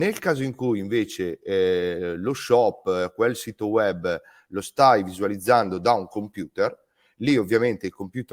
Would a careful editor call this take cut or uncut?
uncut